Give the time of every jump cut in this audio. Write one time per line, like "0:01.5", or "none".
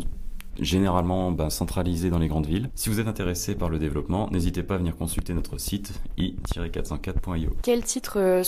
0:02.7